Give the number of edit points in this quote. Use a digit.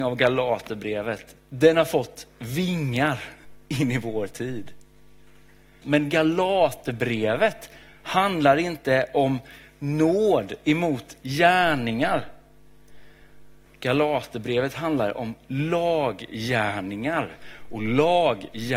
2